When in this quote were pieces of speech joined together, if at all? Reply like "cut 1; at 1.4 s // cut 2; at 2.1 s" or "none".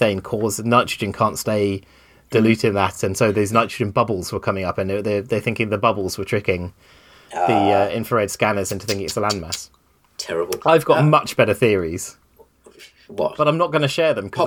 none